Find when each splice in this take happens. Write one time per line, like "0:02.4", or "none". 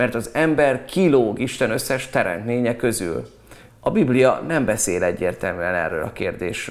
0:03.7